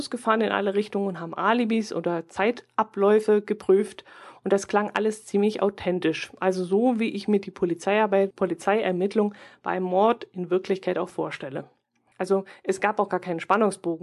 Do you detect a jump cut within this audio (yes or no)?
yes